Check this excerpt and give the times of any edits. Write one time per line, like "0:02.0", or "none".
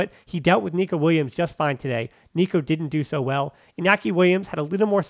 none